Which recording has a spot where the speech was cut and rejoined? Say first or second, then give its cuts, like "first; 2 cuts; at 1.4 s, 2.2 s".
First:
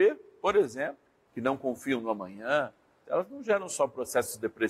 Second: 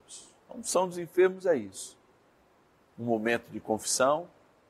first; 2 cuts; at 1.3 s, 3.0 s